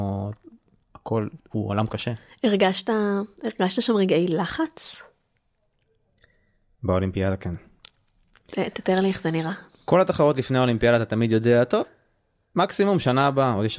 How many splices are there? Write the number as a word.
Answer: zero